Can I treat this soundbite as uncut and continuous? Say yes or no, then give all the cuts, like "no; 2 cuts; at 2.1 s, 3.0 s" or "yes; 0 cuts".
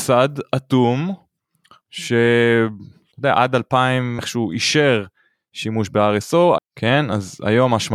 no; 2 cuts; at 4.2 s, 6.6 s